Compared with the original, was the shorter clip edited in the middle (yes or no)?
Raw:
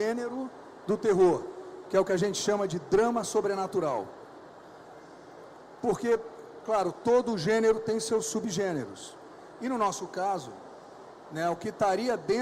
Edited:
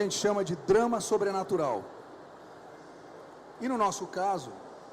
yes